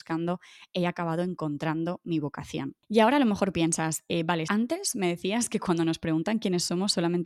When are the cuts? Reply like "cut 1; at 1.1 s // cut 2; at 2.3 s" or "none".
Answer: cut 1; at 4.4 s